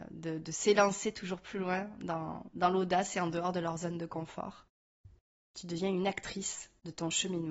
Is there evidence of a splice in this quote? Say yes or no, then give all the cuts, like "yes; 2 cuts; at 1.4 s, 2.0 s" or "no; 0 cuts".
yes; 1 cut; at 5.4 s